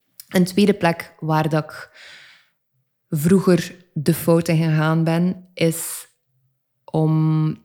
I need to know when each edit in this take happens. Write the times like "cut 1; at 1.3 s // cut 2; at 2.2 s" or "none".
none

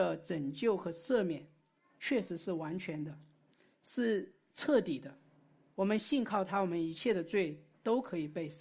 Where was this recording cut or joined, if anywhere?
none

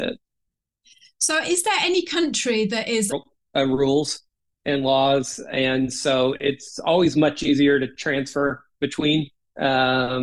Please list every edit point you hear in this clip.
cut 1; at 3.1 s

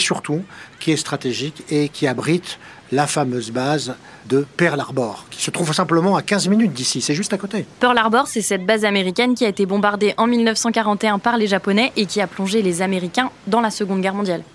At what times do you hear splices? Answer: none

